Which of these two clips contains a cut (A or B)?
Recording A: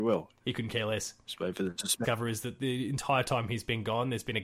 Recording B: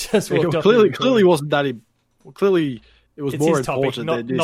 A